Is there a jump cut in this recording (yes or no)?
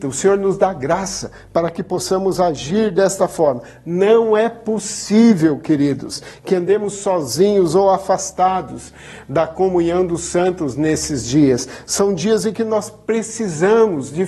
no